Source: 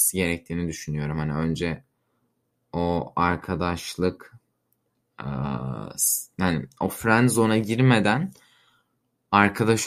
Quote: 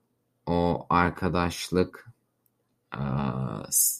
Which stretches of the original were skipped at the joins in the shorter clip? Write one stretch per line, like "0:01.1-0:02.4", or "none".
none